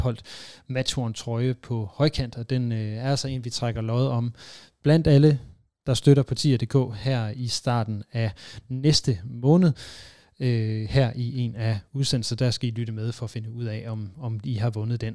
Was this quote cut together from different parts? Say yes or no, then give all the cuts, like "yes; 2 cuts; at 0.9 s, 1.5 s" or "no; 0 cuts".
no; 0 cuts